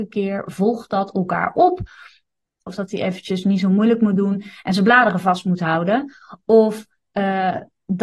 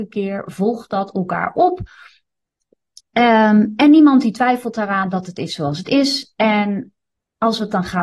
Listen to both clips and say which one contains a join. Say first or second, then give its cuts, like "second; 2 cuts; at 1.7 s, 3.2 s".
first; 1 cut; at 2.7 s